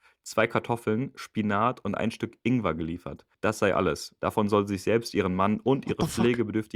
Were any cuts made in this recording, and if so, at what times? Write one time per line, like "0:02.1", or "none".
0:03.3